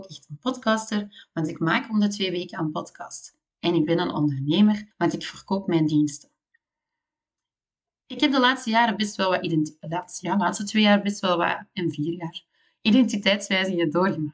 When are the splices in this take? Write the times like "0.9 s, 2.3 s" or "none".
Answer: 10.2 s